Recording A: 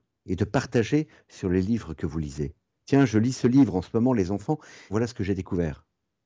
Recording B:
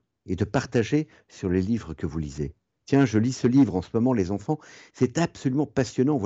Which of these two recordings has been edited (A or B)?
A